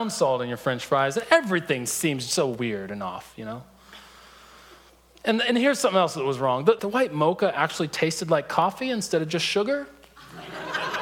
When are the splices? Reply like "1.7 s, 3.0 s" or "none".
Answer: 6.8 s